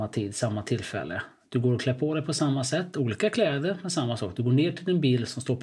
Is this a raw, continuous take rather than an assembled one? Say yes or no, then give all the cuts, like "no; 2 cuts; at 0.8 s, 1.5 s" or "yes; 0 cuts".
yes; 0 cuts